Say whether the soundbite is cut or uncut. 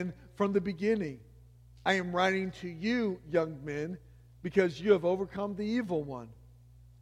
uncut